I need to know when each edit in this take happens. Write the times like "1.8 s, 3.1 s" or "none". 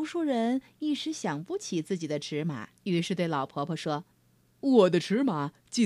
2.8 s, 4.1 s